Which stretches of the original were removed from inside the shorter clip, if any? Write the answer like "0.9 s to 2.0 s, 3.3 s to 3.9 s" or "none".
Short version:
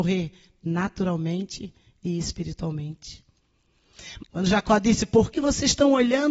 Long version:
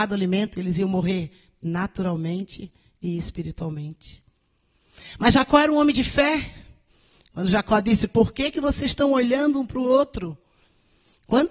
5.2 s to 7.2 s, 8.3 s to 8.5 s

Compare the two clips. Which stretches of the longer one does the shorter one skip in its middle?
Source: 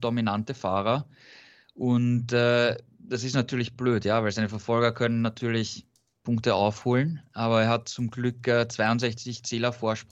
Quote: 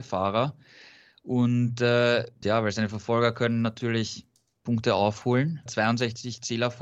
2.9 s to 4.0 s, 7.3 s to 8.7 s

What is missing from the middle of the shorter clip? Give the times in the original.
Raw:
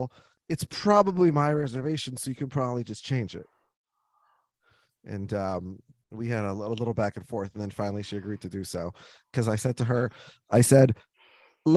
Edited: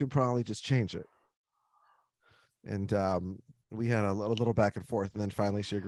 none

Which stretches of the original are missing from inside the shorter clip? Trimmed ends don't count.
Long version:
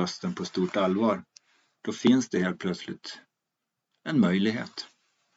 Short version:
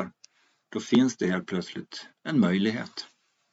3.3 s to 4.0 s

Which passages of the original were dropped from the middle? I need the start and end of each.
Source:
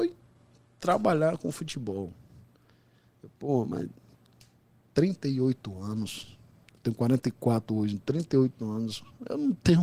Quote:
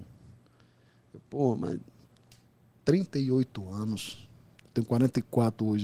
none

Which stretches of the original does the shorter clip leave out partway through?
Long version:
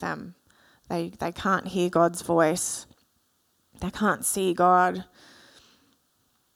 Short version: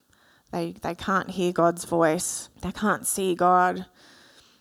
2.9 s to 3.7 s

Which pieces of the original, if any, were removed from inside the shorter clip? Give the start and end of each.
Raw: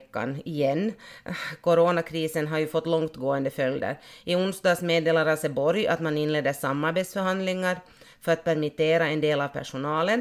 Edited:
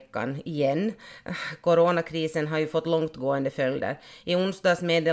none

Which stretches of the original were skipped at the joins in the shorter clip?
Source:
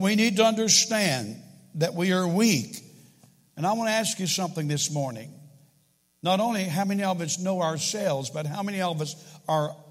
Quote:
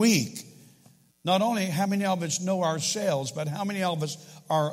3.5 s to 6.1 s

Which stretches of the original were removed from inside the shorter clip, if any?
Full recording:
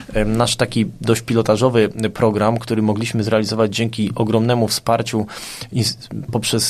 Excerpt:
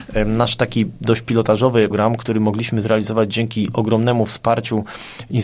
1.9 s to 2.3 s

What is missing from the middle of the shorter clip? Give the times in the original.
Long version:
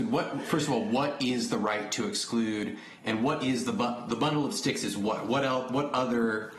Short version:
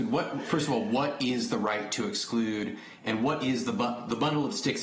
none

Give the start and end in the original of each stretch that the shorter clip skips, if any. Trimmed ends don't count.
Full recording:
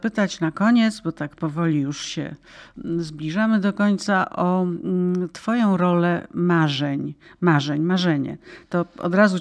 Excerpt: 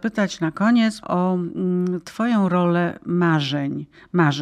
1.0 s to 4.3 s

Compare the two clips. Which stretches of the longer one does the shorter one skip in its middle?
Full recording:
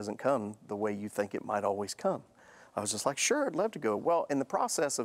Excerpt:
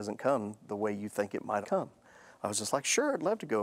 1.6 s to 1.9 s

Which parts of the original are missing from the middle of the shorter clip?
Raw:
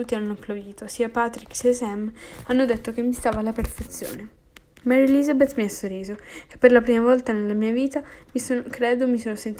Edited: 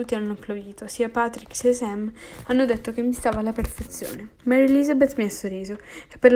4.4 s to 4.8 s

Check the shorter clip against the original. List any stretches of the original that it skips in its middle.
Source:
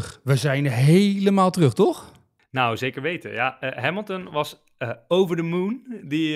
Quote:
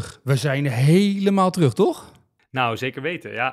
none

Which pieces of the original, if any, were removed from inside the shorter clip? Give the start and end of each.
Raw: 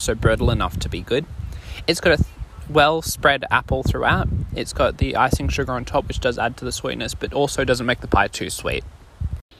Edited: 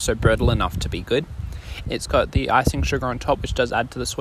1.8 s to 4.5 s

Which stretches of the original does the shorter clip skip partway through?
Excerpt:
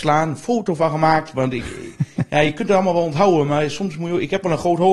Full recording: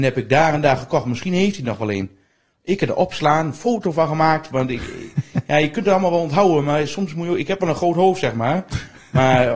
none

